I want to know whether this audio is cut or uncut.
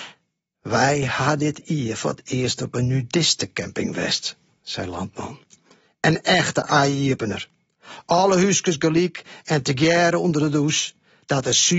uncut